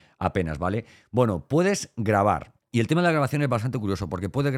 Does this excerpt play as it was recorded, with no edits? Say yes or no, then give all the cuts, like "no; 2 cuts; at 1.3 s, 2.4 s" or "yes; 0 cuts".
yes; 0 cuts